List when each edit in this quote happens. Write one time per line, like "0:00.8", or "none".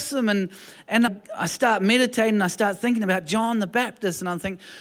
0:01.1